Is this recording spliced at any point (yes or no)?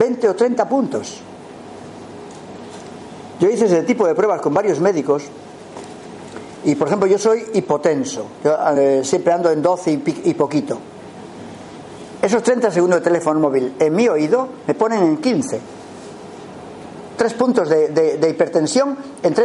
no